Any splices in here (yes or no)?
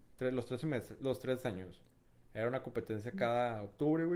no